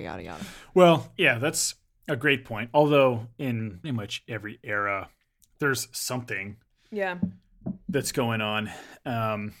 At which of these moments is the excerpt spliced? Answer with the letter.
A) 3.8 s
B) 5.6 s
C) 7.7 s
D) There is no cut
A